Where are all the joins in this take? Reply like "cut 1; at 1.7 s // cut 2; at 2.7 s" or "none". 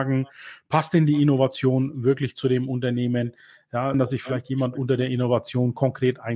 cut 1; at 3.9 s